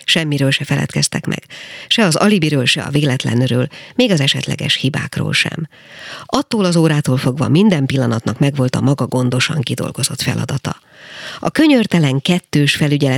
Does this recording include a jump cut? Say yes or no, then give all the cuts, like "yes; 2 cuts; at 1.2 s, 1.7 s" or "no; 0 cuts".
no; 0 cuts